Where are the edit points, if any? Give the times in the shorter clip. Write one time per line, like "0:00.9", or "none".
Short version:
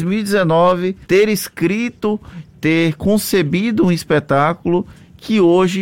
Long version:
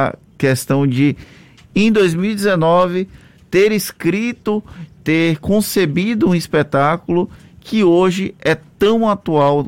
0:01.0